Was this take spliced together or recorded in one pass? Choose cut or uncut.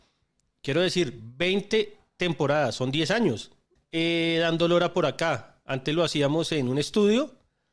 cut